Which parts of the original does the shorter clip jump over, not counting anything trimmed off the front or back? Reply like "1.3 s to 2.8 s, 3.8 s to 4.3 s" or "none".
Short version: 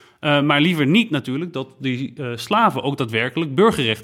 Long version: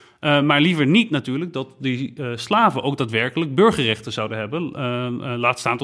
none

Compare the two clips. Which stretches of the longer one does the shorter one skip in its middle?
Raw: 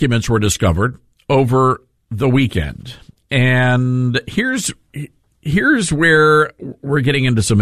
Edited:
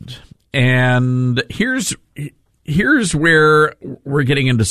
none

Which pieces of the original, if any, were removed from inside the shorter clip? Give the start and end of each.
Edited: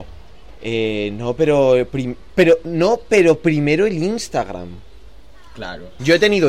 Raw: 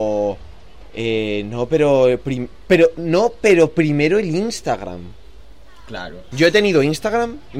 none

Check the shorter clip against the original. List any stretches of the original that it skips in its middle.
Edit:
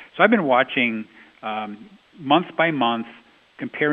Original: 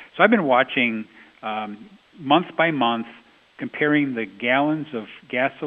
none

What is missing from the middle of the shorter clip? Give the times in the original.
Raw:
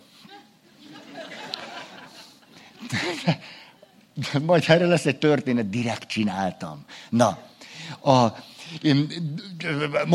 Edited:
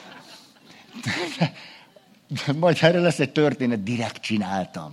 none

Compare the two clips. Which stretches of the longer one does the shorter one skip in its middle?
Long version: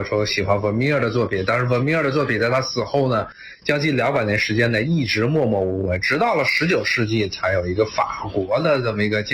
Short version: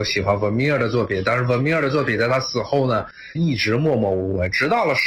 3.6 s to 4.8 s

